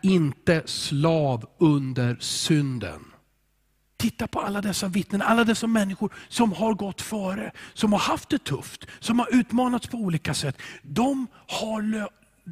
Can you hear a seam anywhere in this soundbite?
yes; 1 cut; at 3.9 s

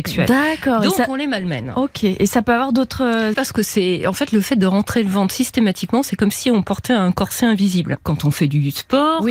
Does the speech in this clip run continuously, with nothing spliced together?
no; 2 cuts; at 3.3 s, 8.0 s

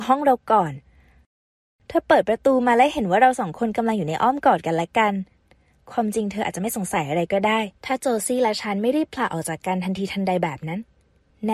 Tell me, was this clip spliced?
yes; 1 cut; at 7.8 s

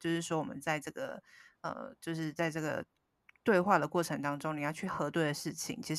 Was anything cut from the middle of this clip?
no; 0 cuts

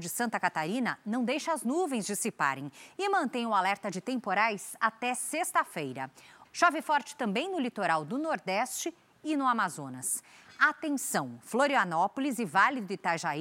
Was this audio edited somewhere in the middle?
yes; 1 cut; at 6.4 s

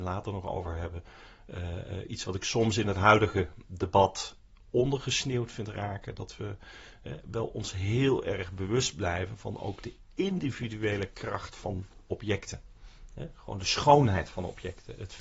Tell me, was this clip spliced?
no; 0 cuts

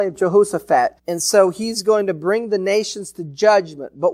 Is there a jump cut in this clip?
yes; 1 cut; at 1.0 s

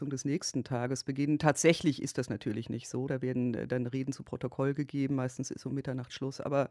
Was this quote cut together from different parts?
no; 0 cuts

